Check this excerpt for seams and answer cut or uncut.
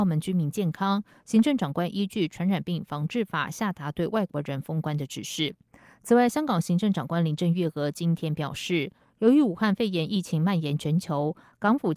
uncut